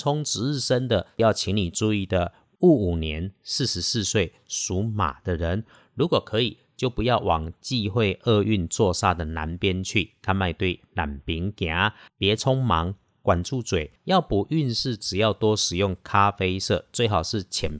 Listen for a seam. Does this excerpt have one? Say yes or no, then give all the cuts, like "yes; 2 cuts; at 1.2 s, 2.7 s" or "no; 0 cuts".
yes; 2 cuts; at 12.1 s, 14.0 s